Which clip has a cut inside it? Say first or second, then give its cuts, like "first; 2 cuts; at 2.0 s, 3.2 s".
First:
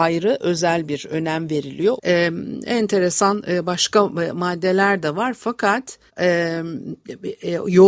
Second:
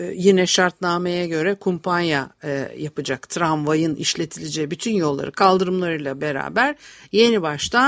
first; 2 cuts; at 2.0 s, 6.1 s